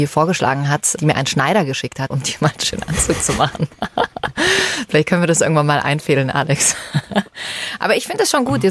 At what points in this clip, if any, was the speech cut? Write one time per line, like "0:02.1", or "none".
0:01.0
0:02.1